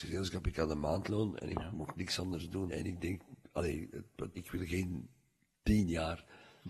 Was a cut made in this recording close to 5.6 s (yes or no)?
no